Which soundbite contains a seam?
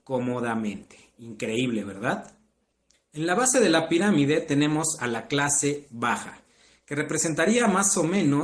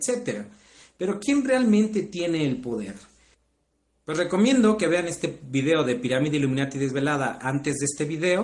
first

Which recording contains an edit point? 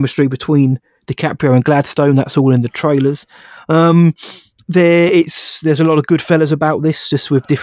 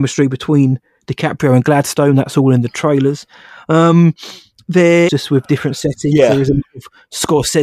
second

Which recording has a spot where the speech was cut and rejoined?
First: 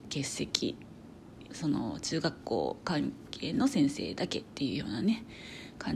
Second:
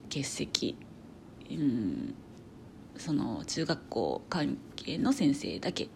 first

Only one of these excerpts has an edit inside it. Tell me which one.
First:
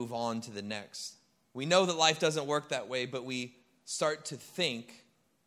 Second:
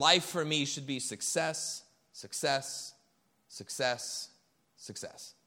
first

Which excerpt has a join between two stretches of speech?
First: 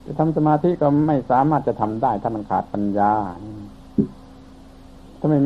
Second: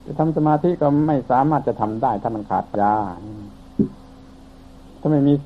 second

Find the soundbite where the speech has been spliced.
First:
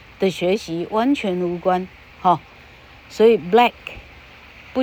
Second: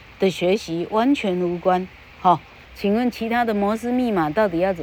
second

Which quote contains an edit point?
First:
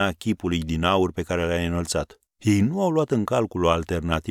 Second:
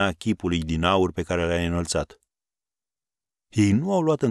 first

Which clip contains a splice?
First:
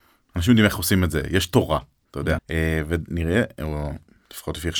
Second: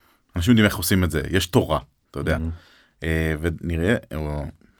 first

